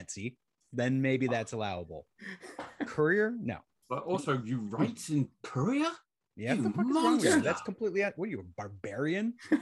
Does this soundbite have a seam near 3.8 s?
yes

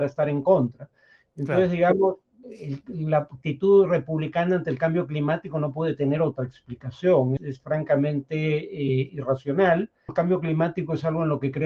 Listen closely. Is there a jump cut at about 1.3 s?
no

